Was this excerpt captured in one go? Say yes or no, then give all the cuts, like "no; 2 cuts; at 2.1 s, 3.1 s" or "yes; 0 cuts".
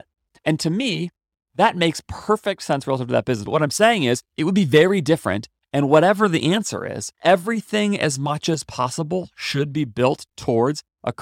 no; 1 cut; at 3.5 s